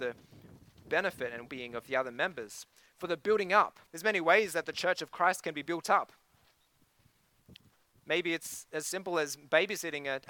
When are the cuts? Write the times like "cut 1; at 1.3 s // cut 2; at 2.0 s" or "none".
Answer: cut 1; at 1.5 s // cut 2; at 3.9 s